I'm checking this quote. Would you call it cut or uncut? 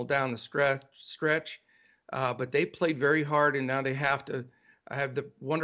uncut